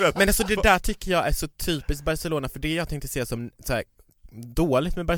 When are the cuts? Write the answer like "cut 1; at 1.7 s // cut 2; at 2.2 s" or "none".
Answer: none